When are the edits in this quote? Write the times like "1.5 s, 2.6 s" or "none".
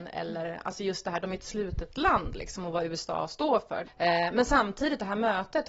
3.8 s

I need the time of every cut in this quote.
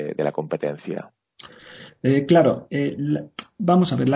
none

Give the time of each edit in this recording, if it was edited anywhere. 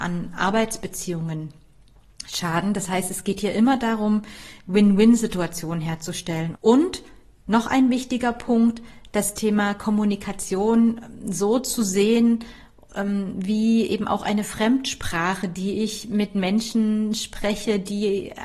6.5 s

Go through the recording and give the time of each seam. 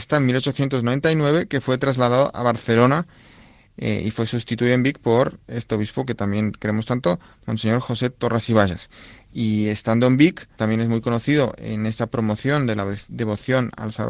9.2 s, 10.6 s

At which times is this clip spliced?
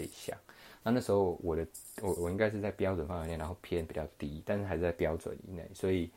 2.2 s

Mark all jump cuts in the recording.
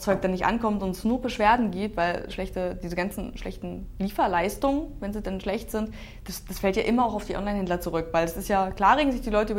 none

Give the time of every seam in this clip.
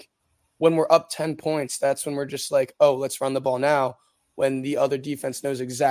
none

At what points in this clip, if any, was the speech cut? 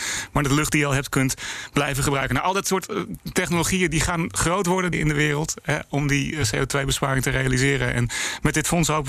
4.9 s

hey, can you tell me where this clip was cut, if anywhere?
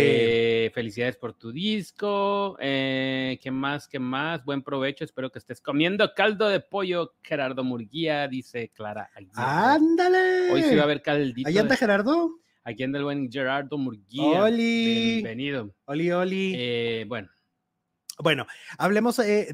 15.8 s

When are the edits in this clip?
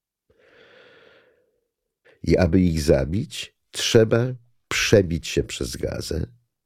2.0 s

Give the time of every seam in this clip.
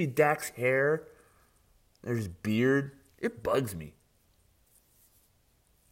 none

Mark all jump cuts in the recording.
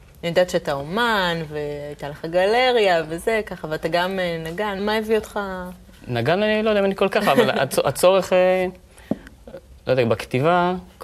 4.8 s

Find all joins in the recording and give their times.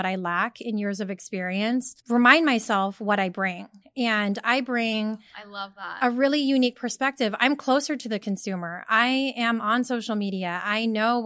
2.0 s

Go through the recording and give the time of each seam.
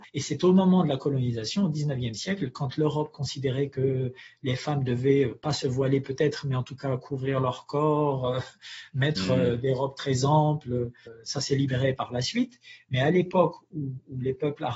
none

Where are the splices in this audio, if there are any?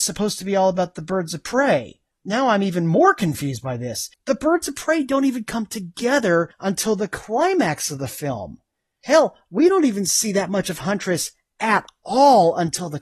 4.1 s

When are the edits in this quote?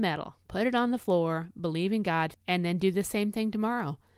2.3 s

